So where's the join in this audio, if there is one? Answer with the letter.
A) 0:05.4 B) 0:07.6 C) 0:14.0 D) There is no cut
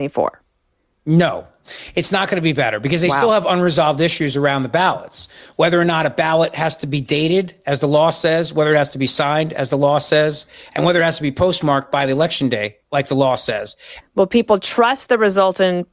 C